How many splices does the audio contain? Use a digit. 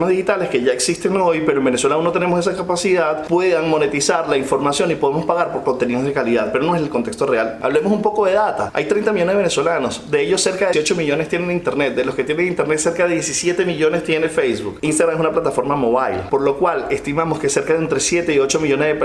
1